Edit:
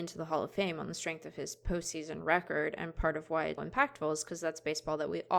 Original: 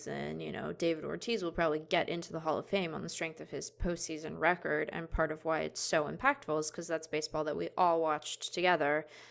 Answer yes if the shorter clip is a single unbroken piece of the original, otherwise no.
no